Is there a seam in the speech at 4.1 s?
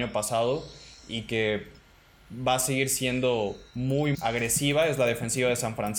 yes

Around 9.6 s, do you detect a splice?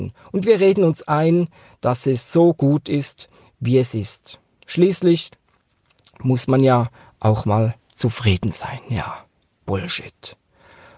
no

